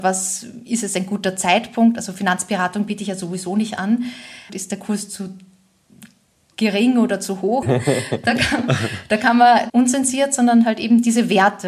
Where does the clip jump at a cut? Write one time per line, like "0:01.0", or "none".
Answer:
0:04.5
0:07.6
0:09.7